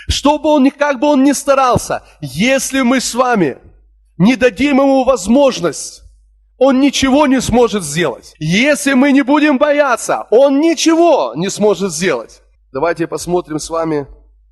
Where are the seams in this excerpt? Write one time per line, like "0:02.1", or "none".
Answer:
0:08.3
0:12.5